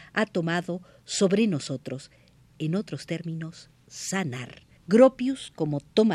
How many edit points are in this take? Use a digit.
1